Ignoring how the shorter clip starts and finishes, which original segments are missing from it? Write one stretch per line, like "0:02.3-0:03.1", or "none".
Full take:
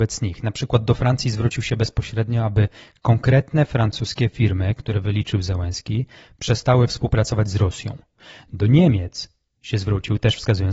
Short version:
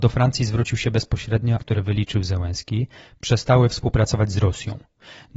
0:02.4-0:04.8